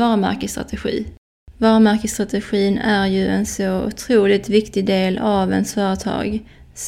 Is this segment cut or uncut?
cut